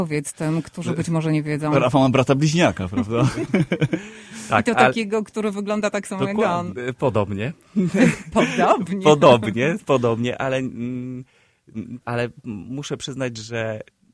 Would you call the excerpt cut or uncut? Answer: cut